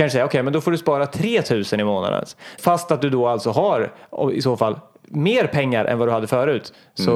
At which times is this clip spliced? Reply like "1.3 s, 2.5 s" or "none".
2.6 s